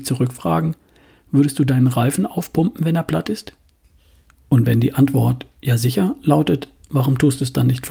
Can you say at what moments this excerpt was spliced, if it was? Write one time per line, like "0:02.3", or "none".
none

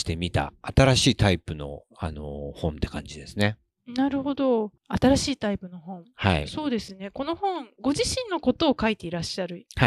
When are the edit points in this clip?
0:04.8

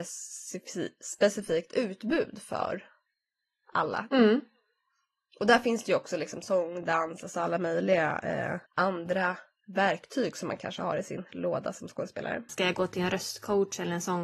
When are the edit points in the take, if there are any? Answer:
0:04.1
0:08.7
0:12.5

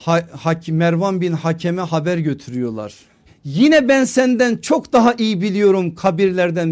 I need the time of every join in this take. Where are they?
0:03.3

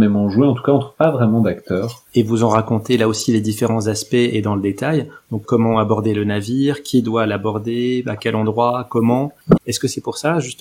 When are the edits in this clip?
0:02.1
0:05.5
0:09.6

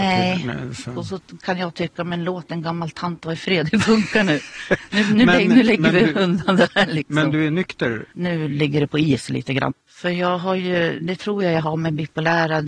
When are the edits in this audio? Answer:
0:08.1
0:09.7
0:11.0

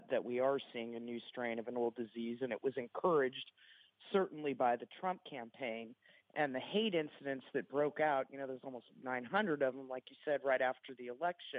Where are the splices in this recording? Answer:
none

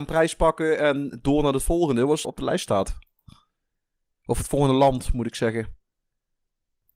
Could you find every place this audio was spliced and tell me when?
0:02.2

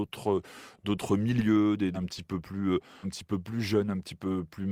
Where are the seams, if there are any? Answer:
0:01.9
0:03.0

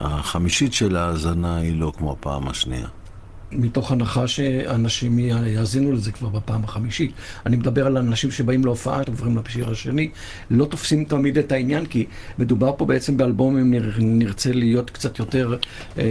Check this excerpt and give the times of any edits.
0:09.0

